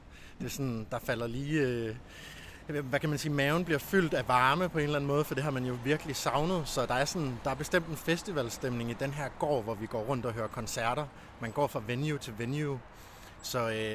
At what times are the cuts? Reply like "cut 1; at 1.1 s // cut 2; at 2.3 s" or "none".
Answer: none